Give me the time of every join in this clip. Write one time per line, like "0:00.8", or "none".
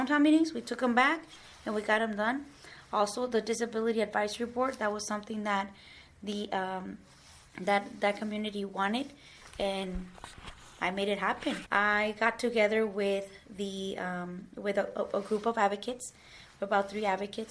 0:11.6